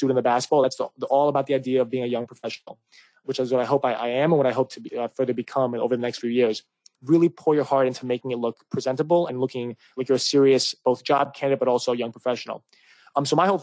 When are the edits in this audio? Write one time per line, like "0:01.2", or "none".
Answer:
0:07.0

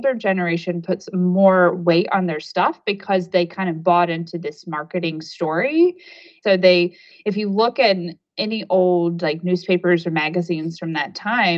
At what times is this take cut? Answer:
0:06.4

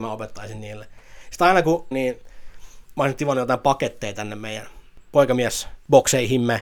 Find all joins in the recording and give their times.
0:01.9
0:02.9

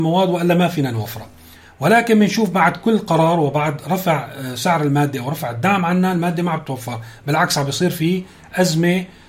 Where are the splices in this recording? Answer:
none

